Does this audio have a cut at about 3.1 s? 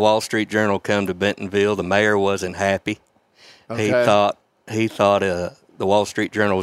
no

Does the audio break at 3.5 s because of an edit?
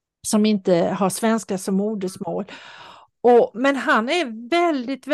no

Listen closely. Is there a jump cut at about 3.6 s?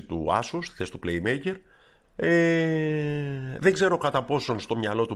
no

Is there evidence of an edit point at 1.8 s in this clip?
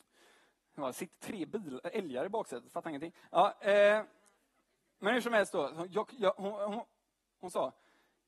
no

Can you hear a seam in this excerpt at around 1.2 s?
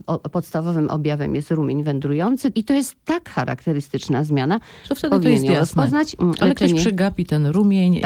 no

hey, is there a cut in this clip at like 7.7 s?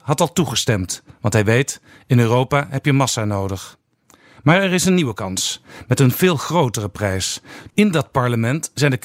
yes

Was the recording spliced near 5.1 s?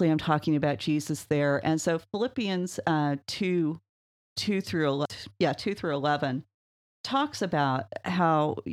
yes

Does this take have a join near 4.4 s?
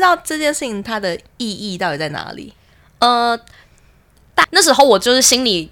yes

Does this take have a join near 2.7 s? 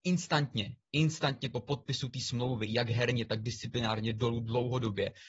no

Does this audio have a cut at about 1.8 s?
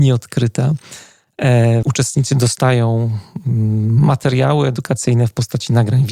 yes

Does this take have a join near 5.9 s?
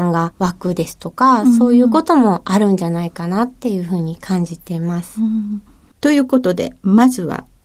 yes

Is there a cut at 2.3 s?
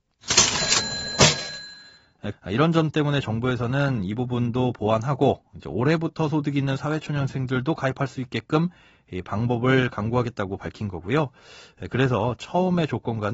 yes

